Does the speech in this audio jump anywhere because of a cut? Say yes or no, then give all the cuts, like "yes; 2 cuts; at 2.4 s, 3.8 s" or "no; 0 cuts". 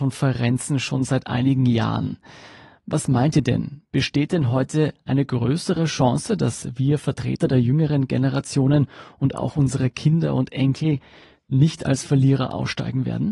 no; 0 cuts